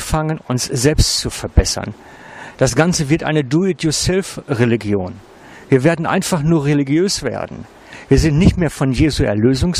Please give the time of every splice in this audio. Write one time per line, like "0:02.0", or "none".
none